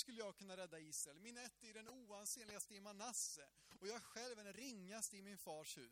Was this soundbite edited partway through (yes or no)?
no